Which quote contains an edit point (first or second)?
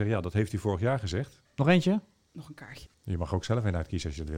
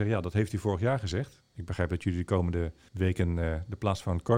first